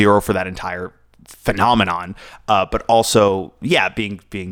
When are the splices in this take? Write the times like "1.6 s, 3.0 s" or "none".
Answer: none